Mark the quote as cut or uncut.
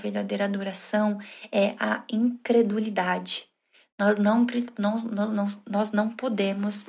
uncut